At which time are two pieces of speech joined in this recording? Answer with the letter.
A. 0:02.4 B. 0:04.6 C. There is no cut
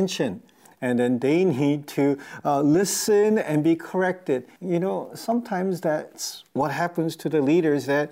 B